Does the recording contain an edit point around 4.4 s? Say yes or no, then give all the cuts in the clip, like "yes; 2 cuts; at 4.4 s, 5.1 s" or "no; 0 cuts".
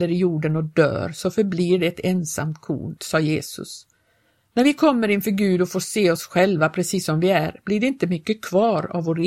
no; 1 cut; at 3.0 s